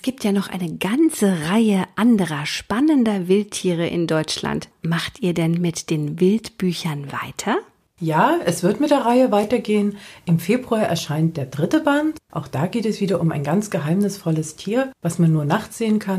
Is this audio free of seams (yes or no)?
yes